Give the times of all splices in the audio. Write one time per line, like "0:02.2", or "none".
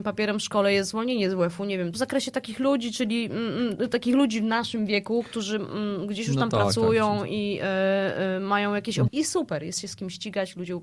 0:01.9
0:09.1